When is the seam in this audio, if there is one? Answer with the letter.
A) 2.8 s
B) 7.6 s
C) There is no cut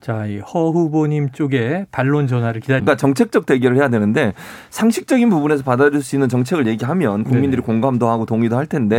A